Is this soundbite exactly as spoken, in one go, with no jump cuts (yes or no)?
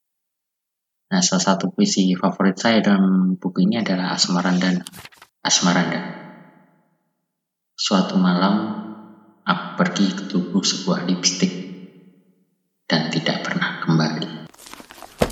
no